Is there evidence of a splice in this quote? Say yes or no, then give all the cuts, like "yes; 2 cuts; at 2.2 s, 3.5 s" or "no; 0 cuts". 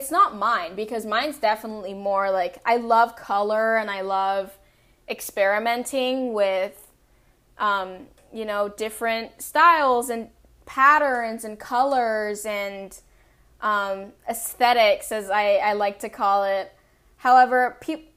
no; 0 cuts